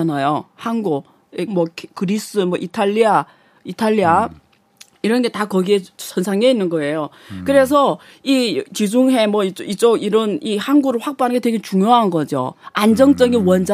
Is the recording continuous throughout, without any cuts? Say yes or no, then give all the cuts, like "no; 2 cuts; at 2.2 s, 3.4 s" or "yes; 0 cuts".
no; 1 cut; at 1.5 s